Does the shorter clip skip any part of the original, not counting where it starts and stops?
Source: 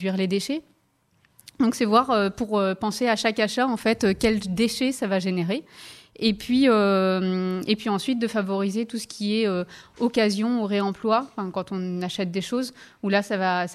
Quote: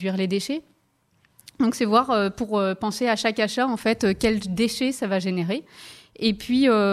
no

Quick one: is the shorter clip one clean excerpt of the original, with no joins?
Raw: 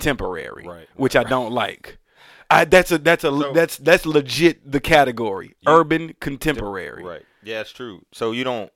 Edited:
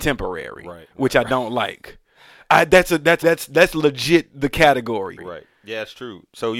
no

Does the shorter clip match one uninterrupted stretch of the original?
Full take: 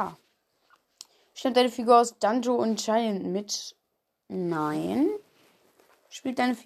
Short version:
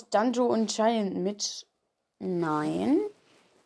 yes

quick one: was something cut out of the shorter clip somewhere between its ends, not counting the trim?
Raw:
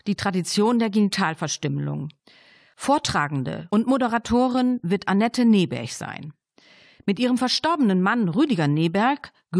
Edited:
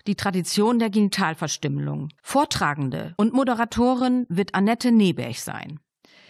yes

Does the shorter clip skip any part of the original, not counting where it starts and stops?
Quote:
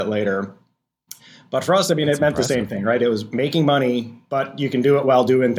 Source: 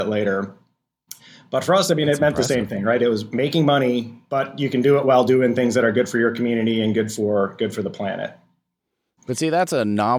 no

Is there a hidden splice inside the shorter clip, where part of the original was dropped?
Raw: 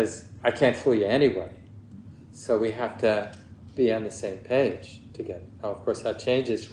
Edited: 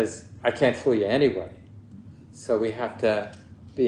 no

